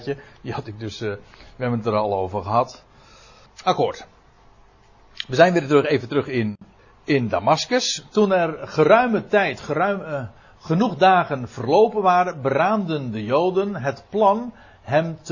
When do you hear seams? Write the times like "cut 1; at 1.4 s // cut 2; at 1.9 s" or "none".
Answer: none